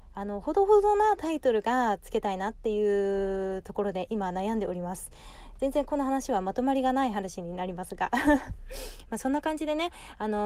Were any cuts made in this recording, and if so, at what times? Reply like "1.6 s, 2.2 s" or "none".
none